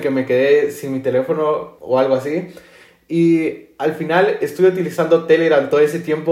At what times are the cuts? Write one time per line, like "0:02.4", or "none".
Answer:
0:01.8